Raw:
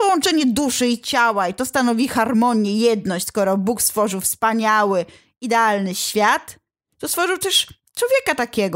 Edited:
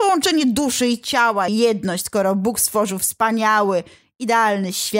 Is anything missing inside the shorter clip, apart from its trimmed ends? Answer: yes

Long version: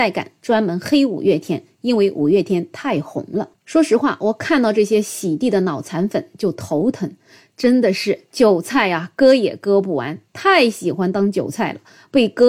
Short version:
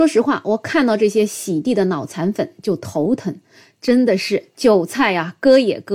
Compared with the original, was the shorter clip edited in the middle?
no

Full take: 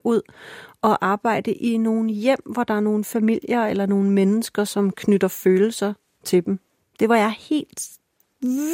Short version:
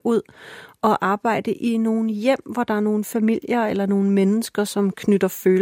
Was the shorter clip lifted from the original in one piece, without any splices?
yes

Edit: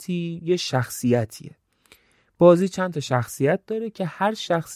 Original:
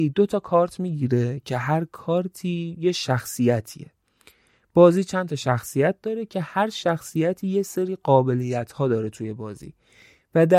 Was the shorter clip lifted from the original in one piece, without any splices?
yes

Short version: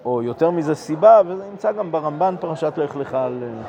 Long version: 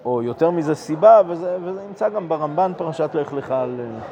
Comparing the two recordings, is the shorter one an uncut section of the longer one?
no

